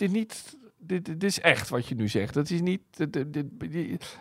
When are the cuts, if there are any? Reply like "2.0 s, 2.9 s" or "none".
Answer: none